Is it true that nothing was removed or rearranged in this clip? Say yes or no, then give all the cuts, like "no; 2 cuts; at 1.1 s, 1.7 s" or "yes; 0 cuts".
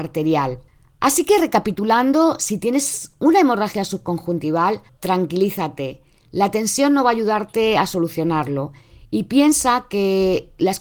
no; 1 cut; at 4.9 s